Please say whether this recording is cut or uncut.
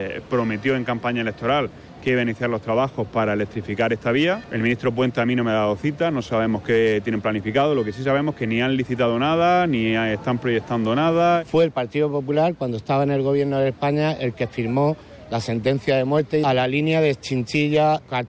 uncut